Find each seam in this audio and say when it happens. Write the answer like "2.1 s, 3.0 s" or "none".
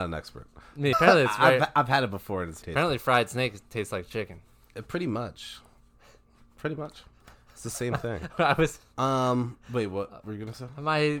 0.9 s, 2.6 s

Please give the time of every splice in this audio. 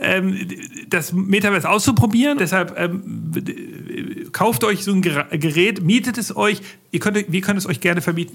2.4 s

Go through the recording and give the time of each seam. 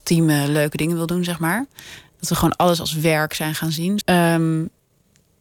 4.0 s

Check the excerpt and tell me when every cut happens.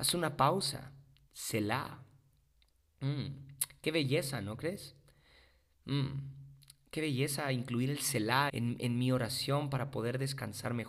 8.5 s

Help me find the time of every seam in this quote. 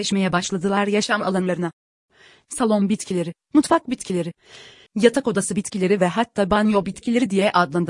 4.9 s

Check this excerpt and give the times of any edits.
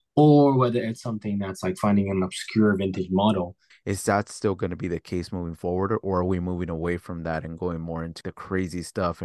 3.7 s, 8.2 s

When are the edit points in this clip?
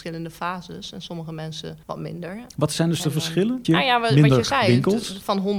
1.8 s, 3.6 s

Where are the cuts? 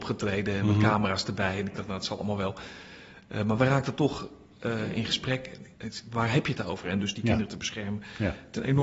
5.7 s, 6.8 s

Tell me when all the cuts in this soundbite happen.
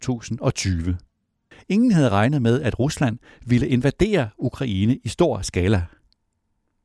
1.5 s

